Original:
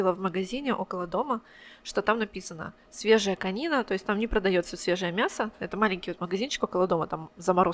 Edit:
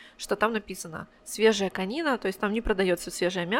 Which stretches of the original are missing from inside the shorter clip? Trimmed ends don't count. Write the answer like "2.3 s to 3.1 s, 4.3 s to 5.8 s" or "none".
none